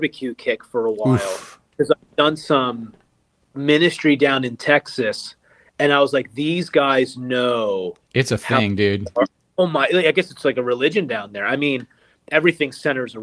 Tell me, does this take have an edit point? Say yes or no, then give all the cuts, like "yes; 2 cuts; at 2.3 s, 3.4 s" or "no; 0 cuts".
no; 0 cuts